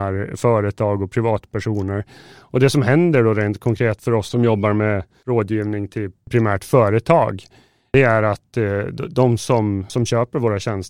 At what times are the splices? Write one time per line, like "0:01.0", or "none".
0:09.9